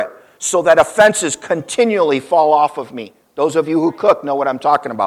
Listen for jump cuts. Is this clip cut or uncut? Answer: uncut